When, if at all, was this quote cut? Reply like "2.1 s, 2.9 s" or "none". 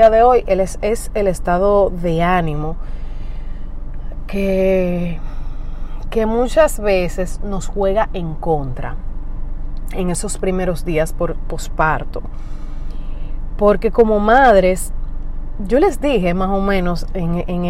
none